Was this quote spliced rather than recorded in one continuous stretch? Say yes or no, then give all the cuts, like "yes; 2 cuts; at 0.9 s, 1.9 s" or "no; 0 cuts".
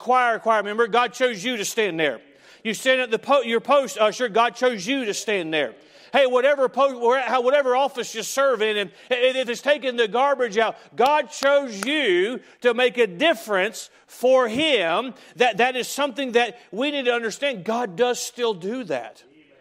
no; 0 cuts